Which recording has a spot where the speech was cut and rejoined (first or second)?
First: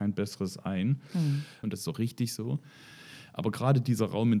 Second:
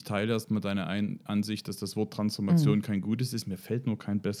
first